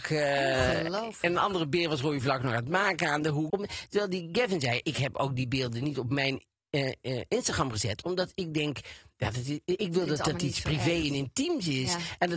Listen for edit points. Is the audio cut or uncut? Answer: cut